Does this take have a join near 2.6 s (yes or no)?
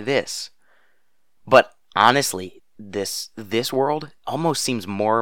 yes